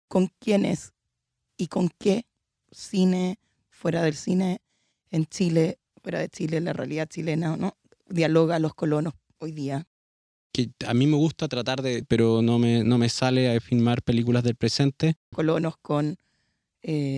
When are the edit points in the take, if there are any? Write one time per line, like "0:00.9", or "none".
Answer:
0:10.4
0:12.0
0:15.3